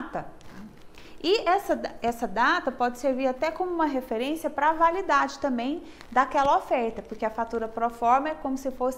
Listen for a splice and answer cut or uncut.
uncut